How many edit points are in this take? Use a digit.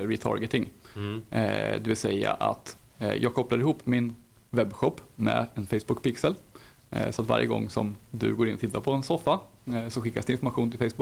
0